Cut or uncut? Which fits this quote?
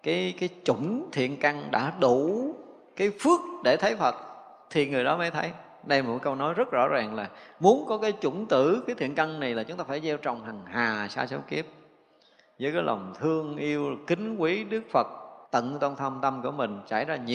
cut